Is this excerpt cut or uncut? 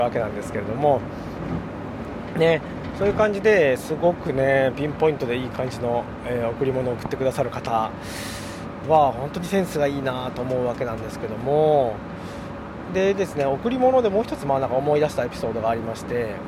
uncut